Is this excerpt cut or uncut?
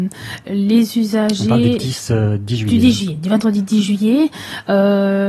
uncut